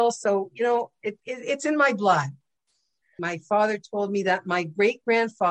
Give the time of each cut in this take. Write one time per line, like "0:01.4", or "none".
0:03.2